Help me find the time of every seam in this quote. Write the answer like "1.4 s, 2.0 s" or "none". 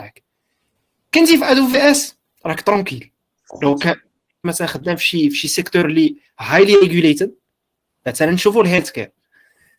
4.4 s